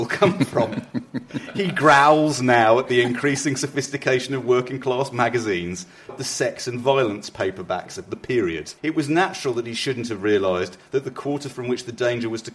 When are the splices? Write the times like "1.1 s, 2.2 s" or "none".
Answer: 6.1 s, 8.8 s